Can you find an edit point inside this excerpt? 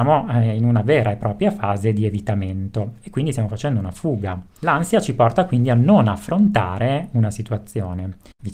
no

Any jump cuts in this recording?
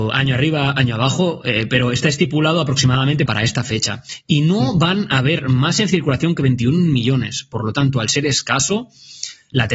yes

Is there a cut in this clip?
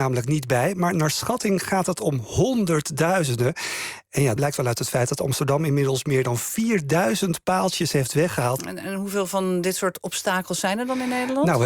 yes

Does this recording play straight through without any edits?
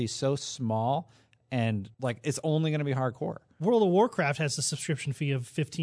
no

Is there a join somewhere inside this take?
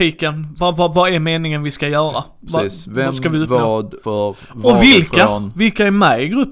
yes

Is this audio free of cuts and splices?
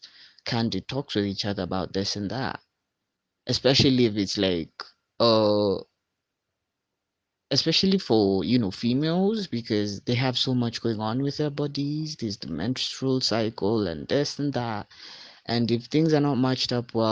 no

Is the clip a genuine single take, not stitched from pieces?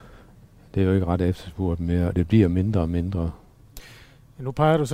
yes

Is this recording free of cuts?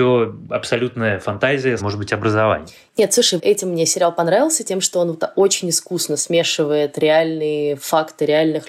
no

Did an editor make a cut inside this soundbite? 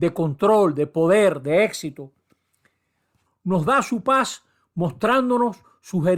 yes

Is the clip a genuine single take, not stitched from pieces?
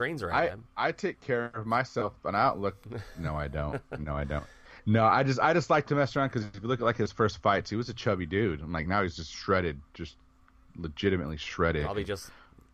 yes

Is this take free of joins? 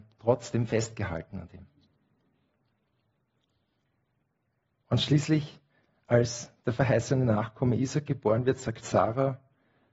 yes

